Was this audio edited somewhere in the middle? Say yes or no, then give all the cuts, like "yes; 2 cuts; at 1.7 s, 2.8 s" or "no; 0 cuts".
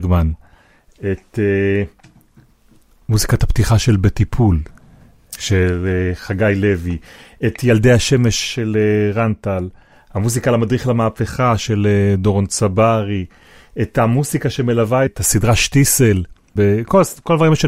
yes; 2 cuts; at 15.1 s, 16.6 s